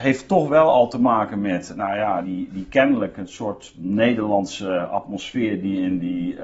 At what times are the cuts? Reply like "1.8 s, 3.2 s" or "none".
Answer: 2.2 s